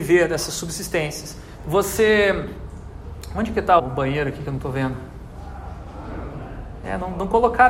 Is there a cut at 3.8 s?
yes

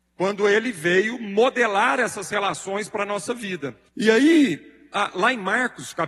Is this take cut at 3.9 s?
yes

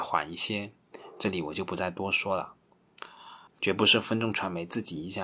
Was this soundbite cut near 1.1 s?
no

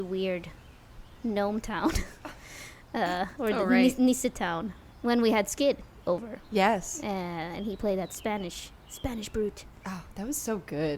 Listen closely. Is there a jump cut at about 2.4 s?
no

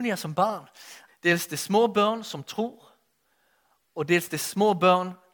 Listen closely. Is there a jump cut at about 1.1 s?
yes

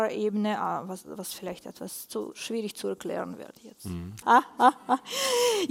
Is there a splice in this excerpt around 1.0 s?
no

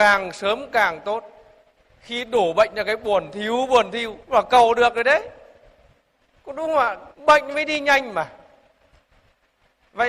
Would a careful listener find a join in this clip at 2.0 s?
no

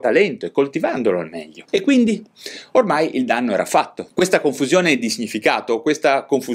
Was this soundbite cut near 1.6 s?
yes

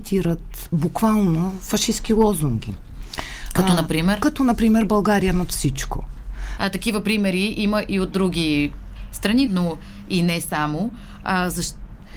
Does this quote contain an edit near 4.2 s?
no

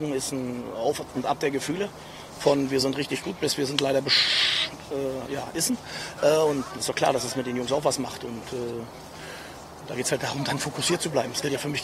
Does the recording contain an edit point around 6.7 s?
yes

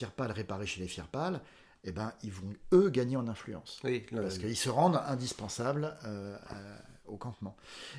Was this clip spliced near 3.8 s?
no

